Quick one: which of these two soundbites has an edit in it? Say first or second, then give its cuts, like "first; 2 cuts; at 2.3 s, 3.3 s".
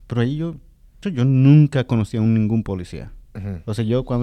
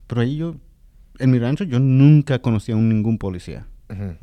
first; 1 cut; at 1.0 s